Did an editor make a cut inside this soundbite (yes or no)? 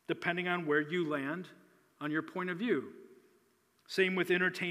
no